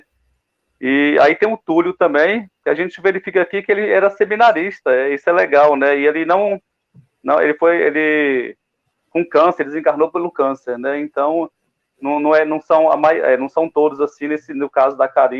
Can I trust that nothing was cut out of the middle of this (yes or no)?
yes